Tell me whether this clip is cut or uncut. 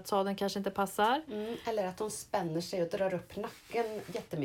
uncut